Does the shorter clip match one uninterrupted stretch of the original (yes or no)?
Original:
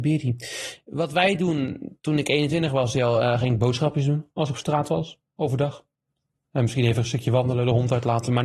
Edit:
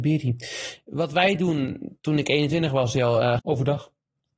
no